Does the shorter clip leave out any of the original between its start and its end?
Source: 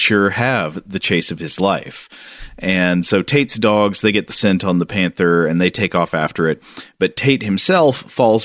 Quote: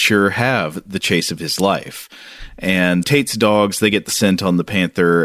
yes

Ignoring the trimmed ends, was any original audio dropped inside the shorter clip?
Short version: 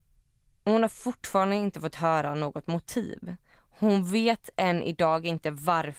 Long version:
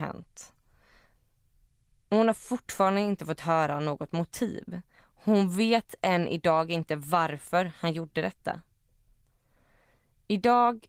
no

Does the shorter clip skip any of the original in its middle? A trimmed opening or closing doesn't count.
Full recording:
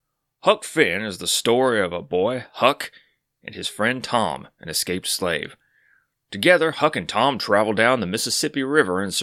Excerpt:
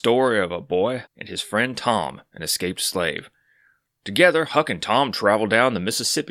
yes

